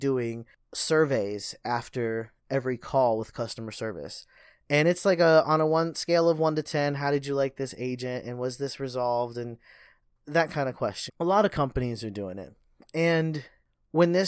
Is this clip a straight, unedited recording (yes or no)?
no